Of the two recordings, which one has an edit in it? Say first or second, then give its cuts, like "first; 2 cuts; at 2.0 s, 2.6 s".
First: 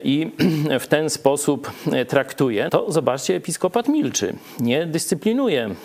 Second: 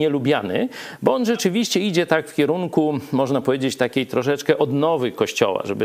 first; 1 cut; at 2.7 s